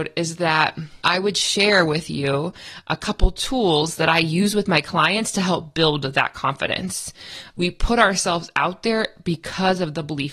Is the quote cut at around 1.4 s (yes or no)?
no